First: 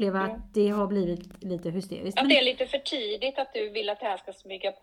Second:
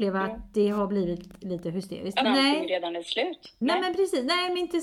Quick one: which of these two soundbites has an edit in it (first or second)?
second